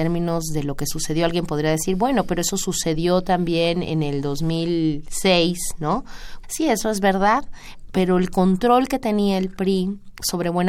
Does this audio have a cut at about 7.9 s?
yes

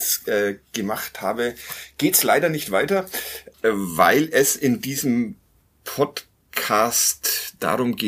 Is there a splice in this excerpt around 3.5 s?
yes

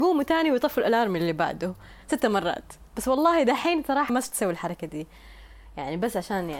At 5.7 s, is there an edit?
no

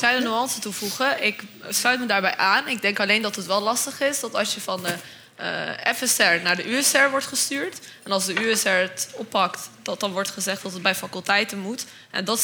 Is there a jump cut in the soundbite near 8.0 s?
no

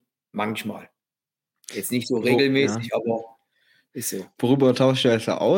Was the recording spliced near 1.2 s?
no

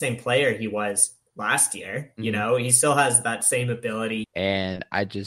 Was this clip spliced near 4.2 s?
yes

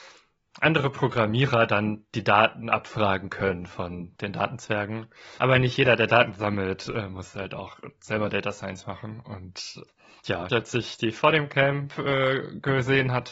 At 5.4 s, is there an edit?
yes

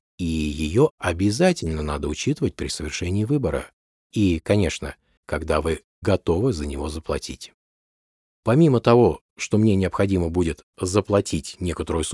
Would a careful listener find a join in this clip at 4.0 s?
no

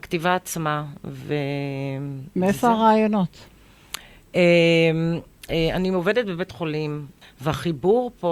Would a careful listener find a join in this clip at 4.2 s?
no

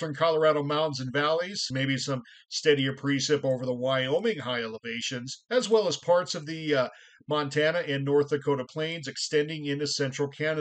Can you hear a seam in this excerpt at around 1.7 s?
no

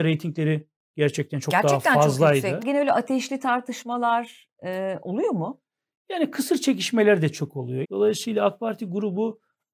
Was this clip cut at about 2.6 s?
yes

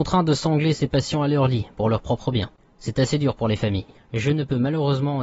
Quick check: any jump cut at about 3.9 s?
yes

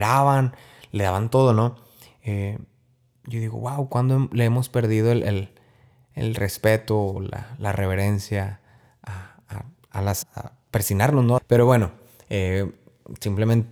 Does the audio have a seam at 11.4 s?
yes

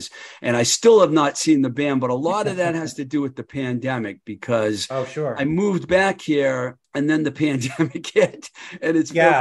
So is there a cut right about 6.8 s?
yes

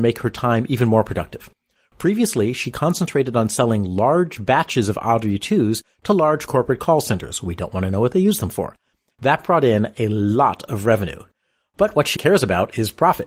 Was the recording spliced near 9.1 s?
no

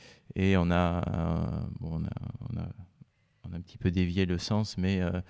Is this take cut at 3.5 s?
no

